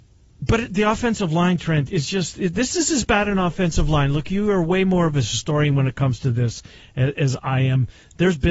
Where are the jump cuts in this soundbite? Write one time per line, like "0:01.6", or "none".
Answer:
none